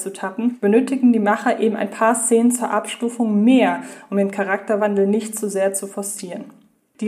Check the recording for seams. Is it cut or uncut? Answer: uncut